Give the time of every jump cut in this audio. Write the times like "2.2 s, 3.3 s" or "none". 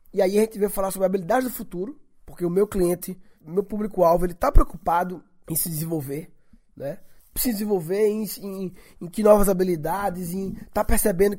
none

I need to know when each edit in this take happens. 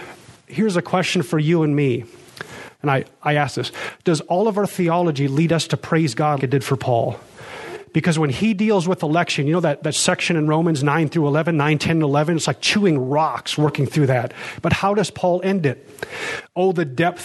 6.4 s

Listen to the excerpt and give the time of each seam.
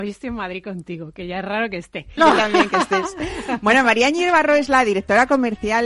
2.2 s

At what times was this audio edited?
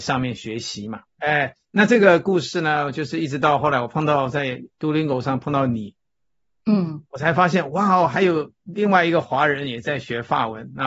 1.2 s

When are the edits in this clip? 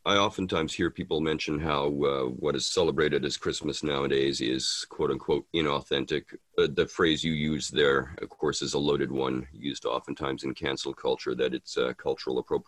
6.4 s, 8.2 s

